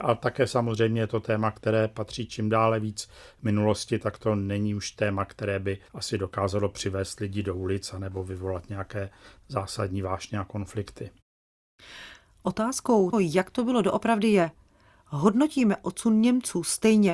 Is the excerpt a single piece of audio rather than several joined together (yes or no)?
no